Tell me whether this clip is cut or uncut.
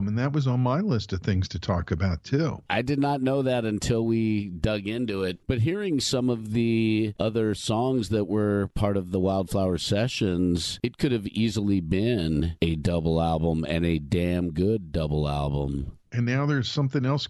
uncut